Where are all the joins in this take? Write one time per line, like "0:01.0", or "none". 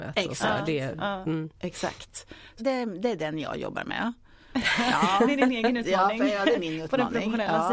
0:02.6